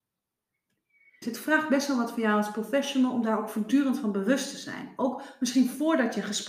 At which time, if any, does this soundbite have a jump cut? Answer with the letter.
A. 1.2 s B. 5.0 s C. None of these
A